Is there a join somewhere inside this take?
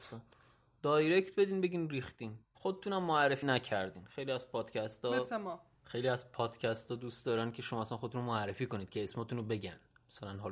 yes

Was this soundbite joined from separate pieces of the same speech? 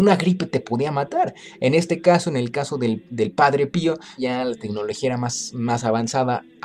yes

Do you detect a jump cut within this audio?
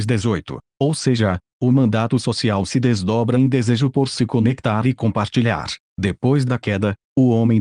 yes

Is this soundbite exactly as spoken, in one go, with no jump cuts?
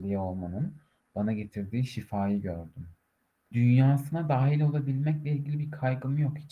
no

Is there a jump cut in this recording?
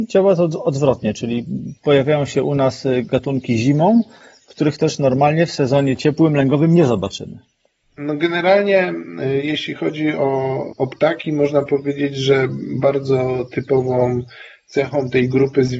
yes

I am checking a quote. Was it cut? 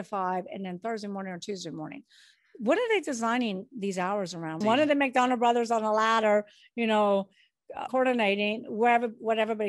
yes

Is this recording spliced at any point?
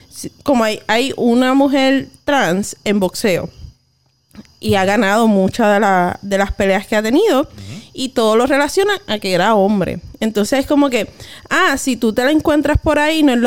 no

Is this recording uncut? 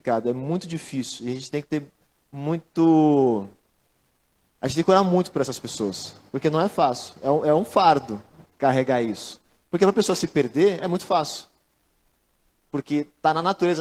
yes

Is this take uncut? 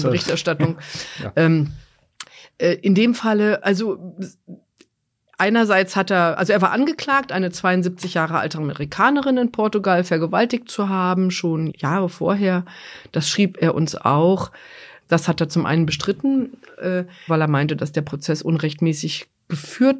no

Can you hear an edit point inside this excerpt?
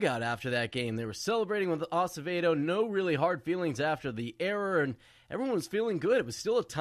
no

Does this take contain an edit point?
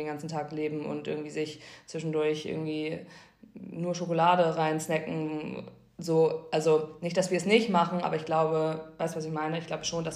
no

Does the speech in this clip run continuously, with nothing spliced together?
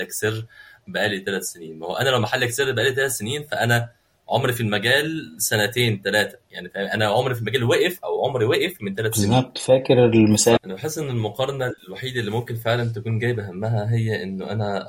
no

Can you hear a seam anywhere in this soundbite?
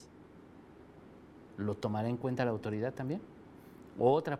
no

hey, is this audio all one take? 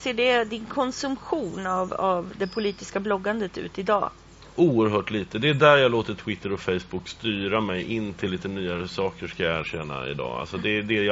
yes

